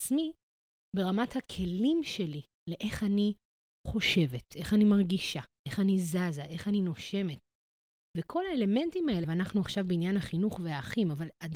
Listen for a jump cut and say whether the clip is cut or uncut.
cut